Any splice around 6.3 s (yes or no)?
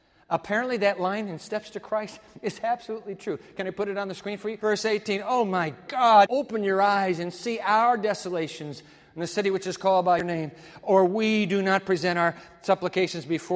yes